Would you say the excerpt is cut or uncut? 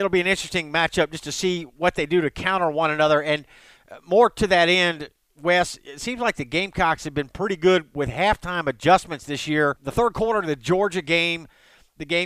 uncut